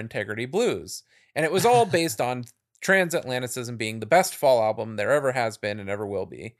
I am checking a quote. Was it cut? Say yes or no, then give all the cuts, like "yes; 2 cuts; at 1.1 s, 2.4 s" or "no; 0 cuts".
no; 0 cuts